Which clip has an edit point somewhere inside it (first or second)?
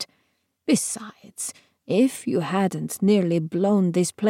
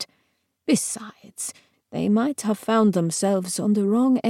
second